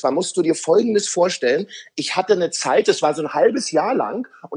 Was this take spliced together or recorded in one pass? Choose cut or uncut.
uncut